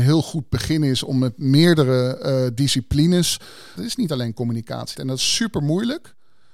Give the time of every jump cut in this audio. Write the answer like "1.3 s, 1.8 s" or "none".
3.8 s, 4.9 s